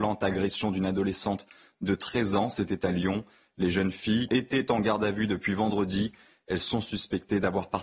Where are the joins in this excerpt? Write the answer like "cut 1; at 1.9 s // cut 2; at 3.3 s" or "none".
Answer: cut 1; at 4.3 s